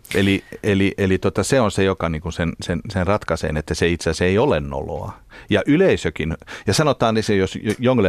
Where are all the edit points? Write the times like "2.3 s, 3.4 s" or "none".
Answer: none